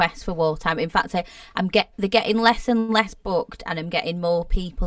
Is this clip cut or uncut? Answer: uncut